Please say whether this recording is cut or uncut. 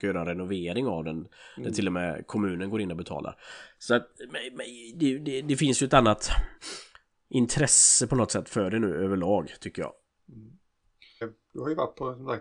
cut